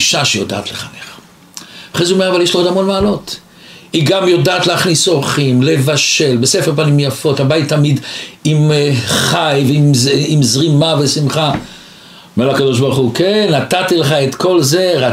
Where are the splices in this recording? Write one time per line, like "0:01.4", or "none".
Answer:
none